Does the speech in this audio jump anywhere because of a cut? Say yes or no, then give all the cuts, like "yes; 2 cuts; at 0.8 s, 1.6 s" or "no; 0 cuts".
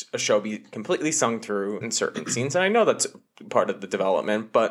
yes; 1 cut; at 1.8 s